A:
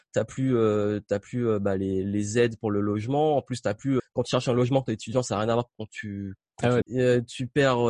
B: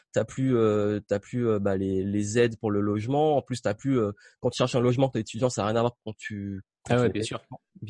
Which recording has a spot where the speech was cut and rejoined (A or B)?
A